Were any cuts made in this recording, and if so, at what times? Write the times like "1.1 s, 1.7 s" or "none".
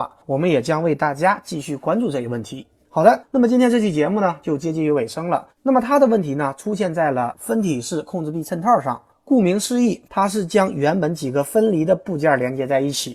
5.5 s, 10.1 s